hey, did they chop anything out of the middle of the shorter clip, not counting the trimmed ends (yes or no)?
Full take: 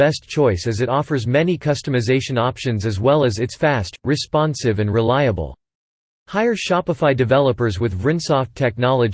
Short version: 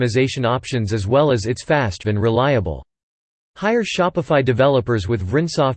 yes